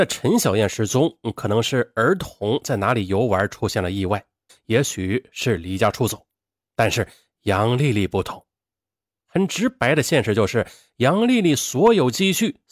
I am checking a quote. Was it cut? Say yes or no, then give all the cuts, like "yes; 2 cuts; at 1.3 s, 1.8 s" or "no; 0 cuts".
yes; 1 cut; at 4.5 s